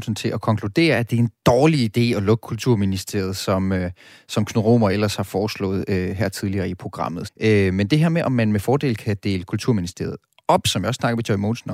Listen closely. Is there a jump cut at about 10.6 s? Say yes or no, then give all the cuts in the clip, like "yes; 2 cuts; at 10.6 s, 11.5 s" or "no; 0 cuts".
no; 1 cut; at 7.2 s